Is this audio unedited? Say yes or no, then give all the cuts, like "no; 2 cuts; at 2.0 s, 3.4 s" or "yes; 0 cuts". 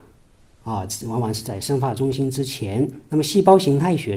yes; 0 cuts